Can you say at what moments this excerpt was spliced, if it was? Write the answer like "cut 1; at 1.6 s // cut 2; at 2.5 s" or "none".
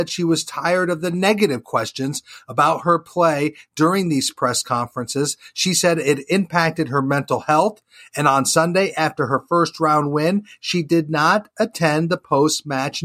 none